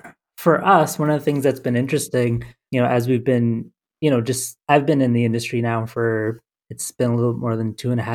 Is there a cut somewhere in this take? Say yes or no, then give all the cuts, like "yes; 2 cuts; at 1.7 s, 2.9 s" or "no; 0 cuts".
yes; 1 cut; at 2.7 s